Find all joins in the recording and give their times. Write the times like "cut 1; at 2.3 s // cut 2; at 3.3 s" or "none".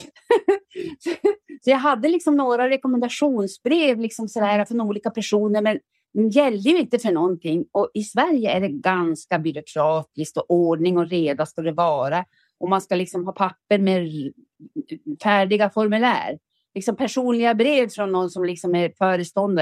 none